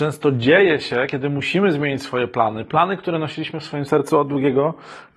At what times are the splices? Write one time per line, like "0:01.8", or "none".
none